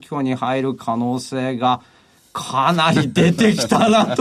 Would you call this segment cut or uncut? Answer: uncut